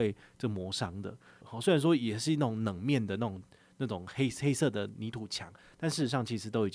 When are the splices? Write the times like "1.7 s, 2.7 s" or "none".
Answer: 1.4 s